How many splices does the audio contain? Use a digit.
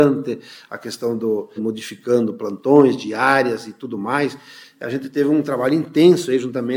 1